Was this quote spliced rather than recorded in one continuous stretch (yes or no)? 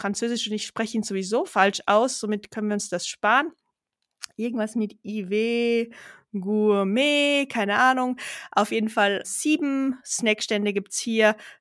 yes